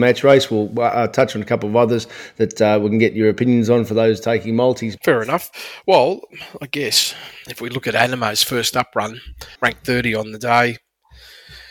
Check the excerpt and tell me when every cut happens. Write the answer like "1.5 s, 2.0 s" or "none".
5.0 s, 9.6 s